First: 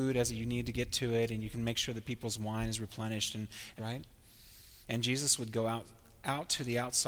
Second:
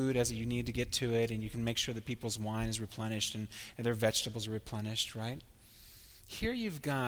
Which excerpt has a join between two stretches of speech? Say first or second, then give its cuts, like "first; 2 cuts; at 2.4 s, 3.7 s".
first; 2 cuts; at 3.8 s, 4.8 s